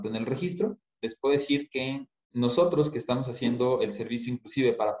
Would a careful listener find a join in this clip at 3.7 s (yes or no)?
no